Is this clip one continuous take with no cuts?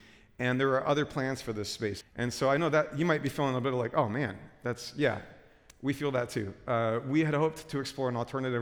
no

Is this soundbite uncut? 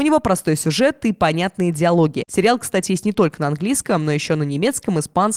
yes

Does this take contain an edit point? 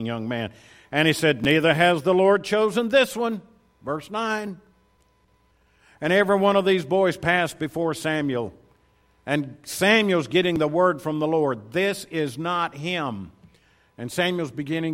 no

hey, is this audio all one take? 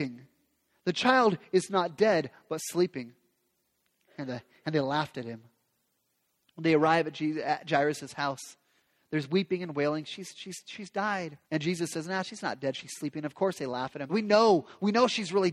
no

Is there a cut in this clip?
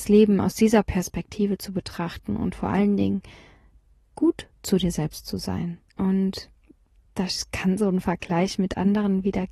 yes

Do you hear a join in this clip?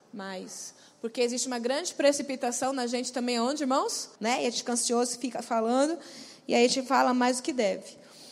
yes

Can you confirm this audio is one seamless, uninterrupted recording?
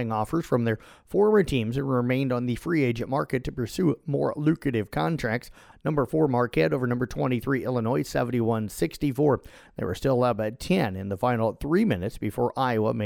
no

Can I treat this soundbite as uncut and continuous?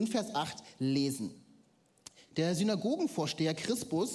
yes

